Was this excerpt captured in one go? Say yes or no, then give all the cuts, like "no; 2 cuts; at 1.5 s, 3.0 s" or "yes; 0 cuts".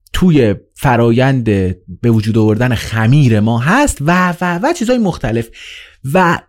yes; 0 cuts